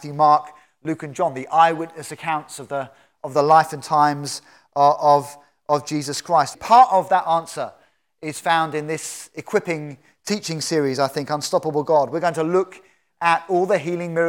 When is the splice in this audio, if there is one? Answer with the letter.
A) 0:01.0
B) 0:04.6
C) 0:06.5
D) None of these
C